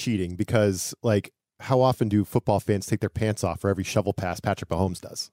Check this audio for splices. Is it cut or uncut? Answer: uncut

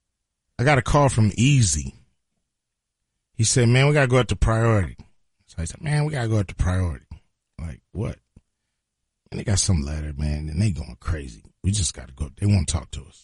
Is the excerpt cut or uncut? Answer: uncut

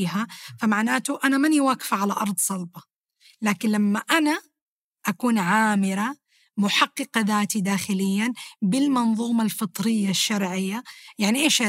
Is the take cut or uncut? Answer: uncut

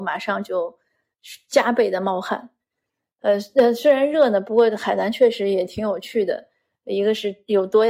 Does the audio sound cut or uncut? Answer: uncut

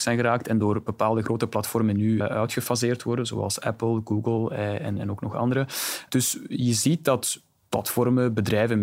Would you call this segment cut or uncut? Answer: cut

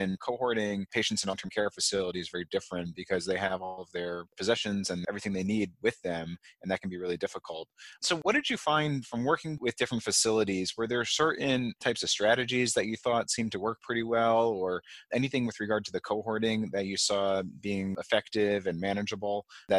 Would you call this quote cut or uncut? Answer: uncut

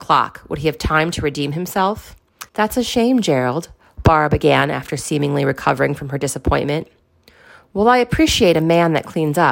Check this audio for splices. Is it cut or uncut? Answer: cut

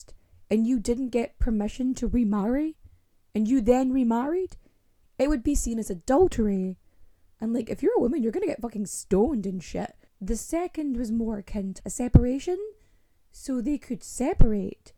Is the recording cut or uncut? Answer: cut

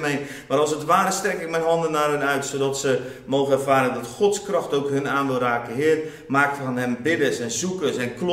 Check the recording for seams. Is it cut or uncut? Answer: uncut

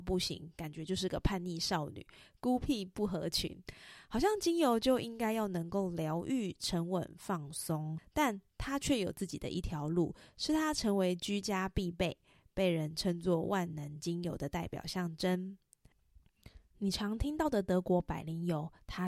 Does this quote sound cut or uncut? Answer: uncut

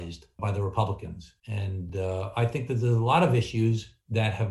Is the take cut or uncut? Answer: uncut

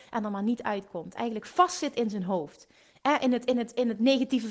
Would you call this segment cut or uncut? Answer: uncut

